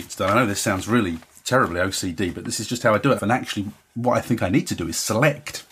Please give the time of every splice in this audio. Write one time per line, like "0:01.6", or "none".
0:03.2